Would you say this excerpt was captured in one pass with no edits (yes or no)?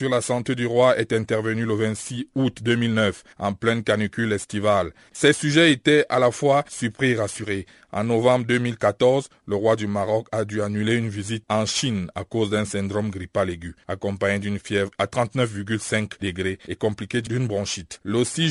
no